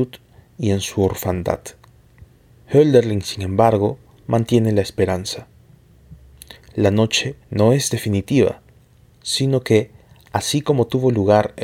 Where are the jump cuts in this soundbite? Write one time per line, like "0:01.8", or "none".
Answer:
0:07.4